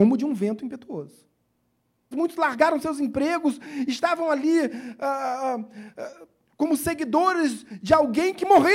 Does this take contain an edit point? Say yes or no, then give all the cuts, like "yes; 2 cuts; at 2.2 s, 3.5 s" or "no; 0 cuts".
yes; 1 cut; at 2.1 s